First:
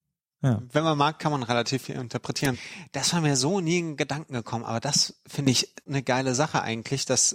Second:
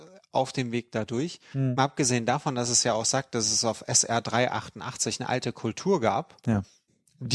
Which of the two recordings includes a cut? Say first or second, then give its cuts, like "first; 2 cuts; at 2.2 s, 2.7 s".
first; 2 cuts; at 2.5 s, 5.9 s